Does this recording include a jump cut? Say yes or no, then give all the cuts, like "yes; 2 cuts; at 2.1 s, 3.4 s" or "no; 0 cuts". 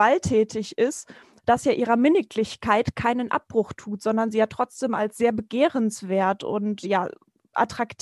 yes; 2 cuts; at 1.4 s, 6.8 s